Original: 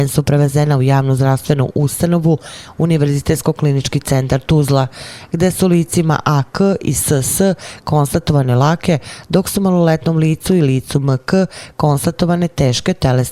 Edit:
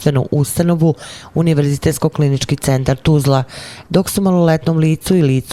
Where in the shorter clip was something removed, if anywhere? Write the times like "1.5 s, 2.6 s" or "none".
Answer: 3.9 s